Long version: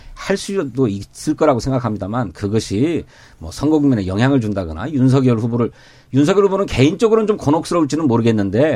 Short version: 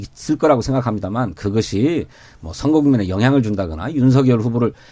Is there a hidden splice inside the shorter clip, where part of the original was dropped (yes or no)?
no